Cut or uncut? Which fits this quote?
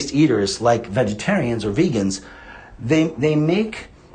uncut